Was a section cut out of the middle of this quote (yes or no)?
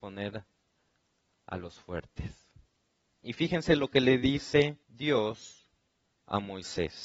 yes